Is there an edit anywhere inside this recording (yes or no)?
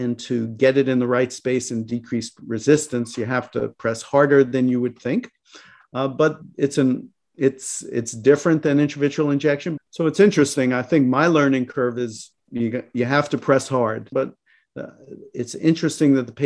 yes